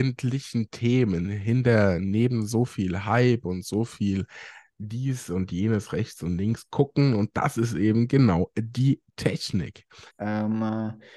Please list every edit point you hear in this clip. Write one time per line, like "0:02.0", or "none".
0:10.1

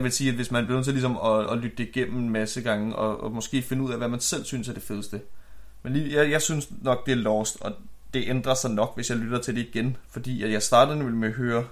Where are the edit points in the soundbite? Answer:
0:10.0

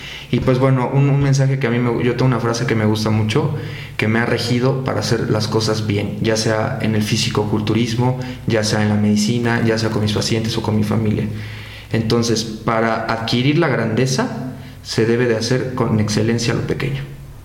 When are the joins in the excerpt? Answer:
none

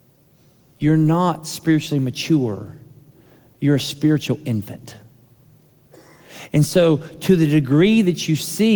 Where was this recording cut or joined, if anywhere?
none

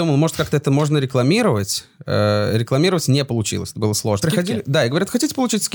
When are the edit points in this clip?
0:04.2

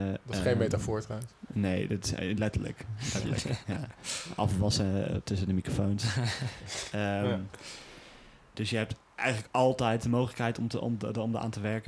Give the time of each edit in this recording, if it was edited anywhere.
0:08.5

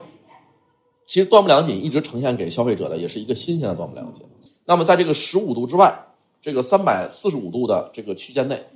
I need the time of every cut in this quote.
0:04.5

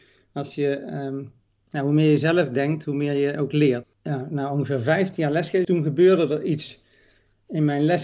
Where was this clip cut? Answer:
0:03.8
0:05.6

